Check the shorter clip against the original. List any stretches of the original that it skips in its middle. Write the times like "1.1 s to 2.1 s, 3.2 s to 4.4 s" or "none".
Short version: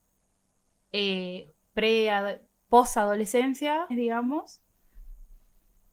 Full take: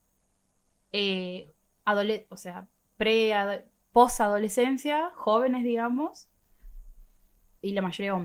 1.6 s to 2.9 s, 5.1 s to 5.6 s